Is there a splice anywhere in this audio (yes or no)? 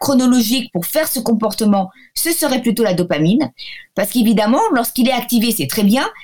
yes